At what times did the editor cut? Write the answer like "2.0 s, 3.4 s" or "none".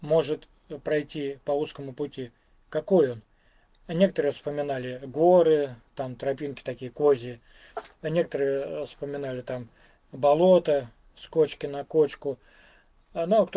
none